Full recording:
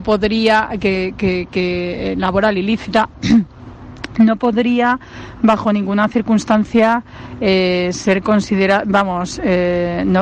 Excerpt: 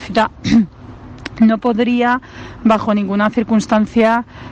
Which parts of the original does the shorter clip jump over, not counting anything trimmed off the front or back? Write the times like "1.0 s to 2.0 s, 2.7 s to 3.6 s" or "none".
none